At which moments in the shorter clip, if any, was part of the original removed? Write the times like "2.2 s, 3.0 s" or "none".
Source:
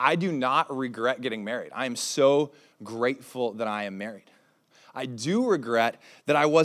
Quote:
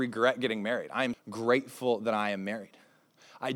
1.1 s